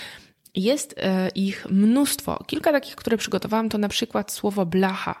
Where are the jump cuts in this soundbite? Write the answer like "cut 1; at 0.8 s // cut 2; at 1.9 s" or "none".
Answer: none